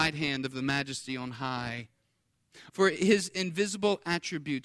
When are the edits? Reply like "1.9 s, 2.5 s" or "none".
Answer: 2.7 s